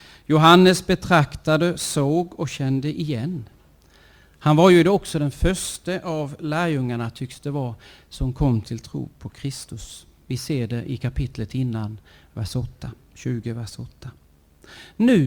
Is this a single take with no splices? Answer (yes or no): yes